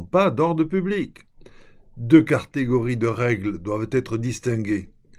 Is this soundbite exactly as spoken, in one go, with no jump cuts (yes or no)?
yes